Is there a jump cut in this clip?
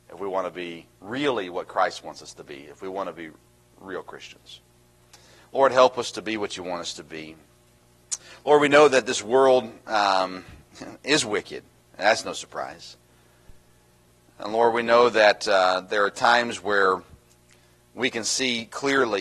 yes; 1 cut; at 0.9 s

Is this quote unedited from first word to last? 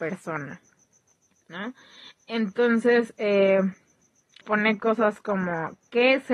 no; 1 cut; at 4.4 s

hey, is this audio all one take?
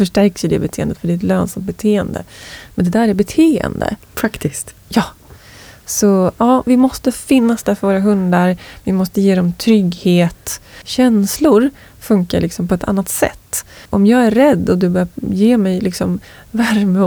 no; 2 cuts; at 4.0 s, 10.8 s

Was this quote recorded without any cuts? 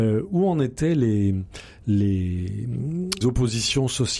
no; 1 cut; at 3.2 s

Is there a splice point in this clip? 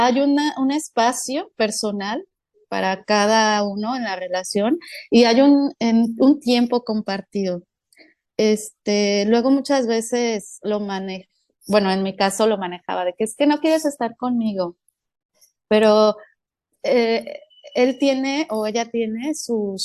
no; 0 cuts

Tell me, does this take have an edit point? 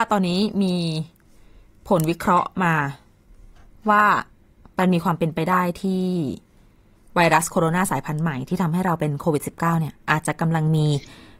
no; 0 cuts

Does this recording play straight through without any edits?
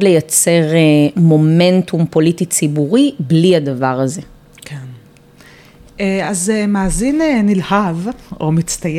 yes; 0 cuts

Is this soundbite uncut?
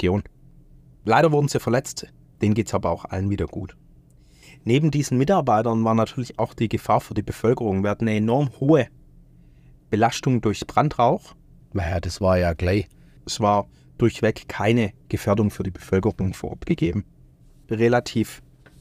no; 3 cuts; at 11.6 s, 13.2 s, 15.0 s

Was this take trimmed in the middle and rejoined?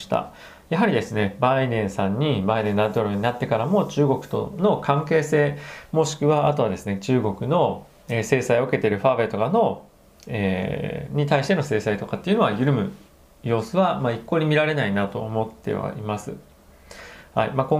no; 0 cuts

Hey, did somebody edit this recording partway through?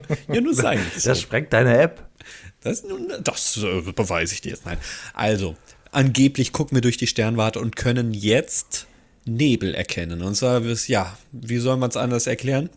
no; 0 cuts

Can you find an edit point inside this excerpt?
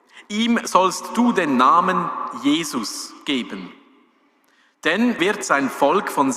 yes; 1 cut; at 5.2 s

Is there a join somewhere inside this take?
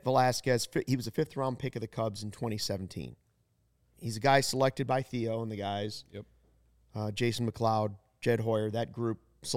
yes; 1 cut; at 3.9 s

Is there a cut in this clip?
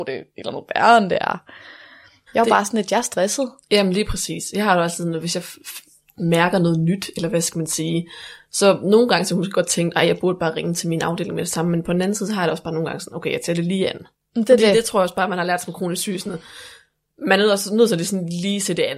yes; 1 cut; at 2.3 s

